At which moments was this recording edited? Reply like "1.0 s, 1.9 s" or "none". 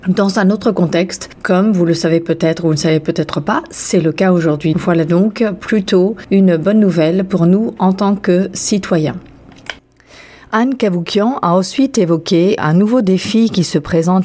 4.7 s, 12.6 s